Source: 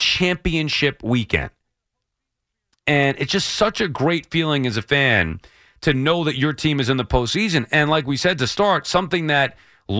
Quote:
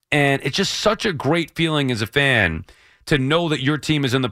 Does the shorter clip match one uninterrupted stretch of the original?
yes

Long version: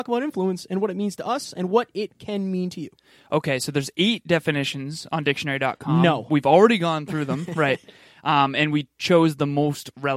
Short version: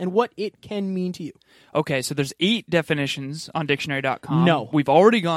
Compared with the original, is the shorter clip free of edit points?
yes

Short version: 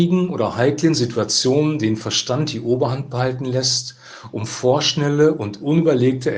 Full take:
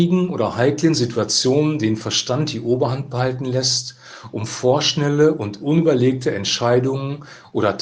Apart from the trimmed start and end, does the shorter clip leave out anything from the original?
no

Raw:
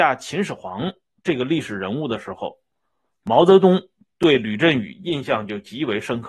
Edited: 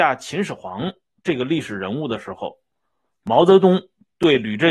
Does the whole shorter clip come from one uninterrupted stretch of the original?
yes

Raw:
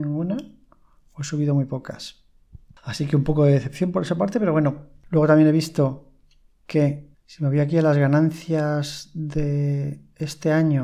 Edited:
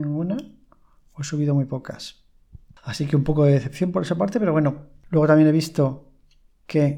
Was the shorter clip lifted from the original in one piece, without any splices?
yes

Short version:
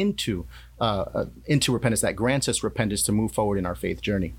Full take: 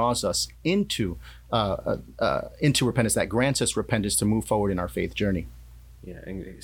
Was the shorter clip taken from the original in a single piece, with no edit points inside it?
no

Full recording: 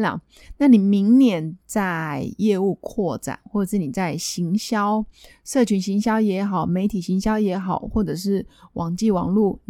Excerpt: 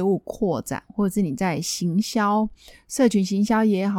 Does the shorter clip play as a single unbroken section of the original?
yes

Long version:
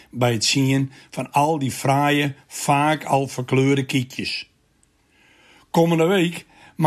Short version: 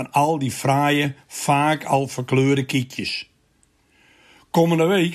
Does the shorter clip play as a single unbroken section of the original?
yes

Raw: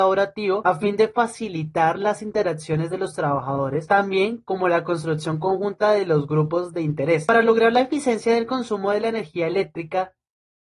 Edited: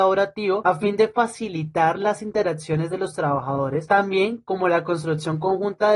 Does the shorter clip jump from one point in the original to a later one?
no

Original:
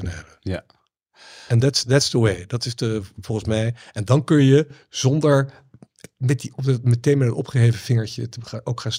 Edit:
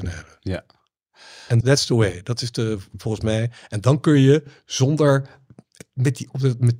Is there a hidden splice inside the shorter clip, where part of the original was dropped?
yes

